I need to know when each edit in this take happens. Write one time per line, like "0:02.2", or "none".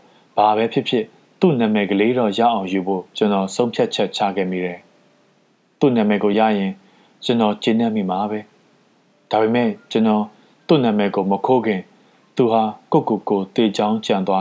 none